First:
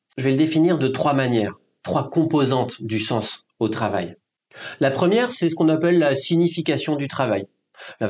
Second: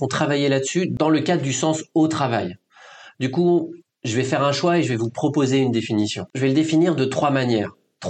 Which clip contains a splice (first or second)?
second